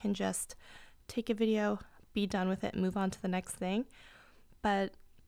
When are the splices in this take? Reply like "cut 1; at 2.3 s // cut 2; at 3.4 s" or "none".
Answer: cut 1; at 2.1 s